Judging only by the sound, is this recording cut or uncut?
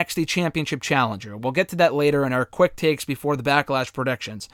uncut